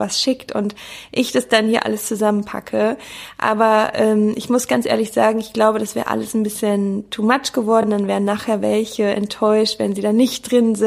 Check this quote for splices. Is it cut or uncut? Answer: uncut